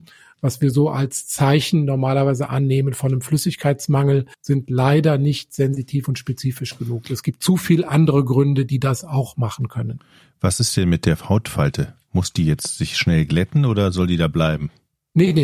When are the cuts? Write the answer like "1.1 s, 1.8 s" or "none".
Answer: 4.3 s